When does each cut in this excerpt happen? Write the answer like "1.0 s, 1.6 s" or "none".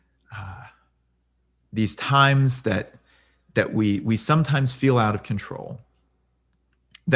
none